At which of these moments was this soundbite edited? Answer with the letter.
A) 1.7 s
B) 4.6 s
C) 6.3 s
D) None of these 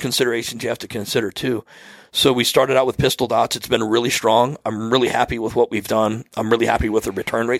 D